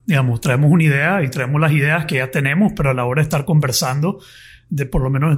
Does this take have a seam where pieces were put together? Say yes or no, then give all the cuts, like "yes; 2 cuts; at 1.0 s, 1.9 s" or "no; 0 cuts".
no; 0 cuts